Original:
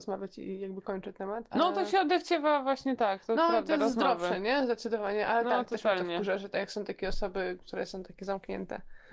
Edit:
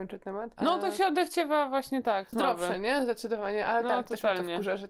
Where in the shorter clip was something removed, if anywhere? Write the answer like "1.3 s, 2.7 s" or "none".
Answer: 2.3 s